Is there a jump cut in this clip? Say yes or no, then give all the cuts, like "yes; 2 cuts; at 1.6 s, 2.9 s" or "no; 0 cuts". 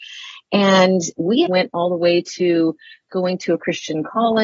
yes; 1 cut; at 1.5 s